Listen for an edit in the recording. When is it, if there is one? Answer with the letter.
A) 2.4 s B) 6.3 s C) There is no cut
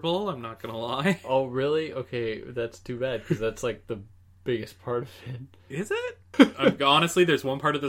B